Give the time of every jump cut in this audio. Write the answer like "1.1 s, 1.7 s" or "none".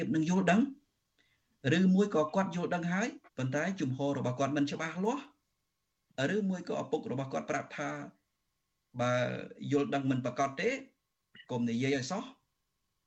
3.3 s